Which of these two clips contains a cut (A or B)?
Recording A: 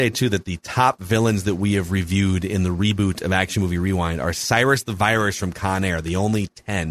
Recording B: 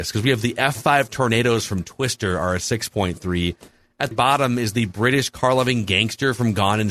B